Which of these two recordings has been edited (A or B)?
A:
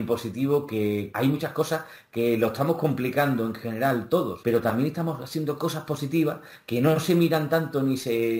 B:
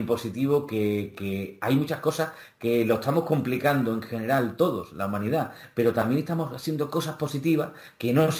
A